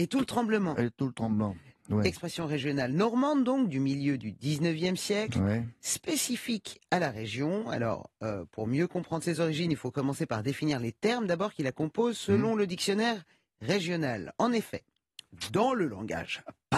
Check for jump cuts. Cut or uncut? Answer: uncut